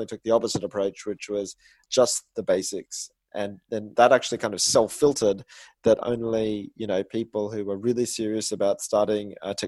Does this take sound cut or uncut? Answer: uncut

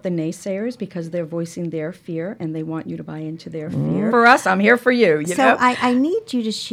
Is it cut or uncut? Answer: cut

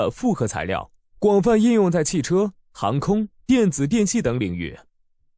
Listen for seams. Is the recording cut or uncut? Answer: uncut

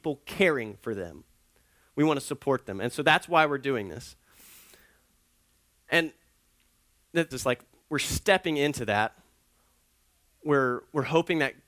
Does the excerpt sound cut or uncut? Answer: cut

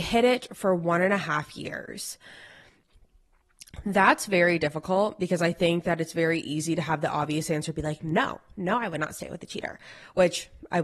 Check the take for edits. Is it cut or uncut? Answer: uncut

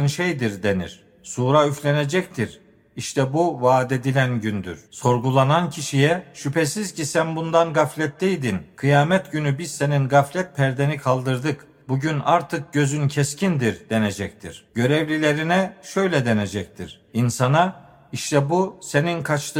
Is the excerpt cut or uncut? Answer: cut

